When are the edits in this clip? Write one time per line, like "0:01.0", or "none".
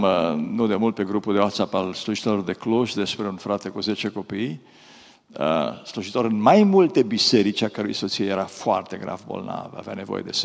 none